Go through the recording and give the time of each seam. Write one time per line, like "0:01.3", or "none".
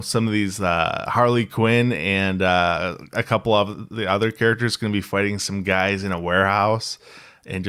none